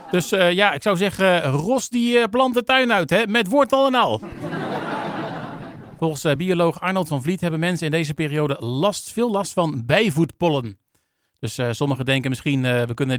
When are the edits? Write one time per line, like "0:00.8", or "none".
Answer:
none